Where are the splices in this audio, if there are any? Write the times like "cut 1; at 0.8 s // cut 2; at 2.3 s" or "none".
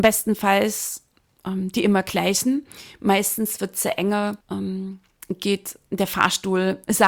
cut 1; at 4.4 s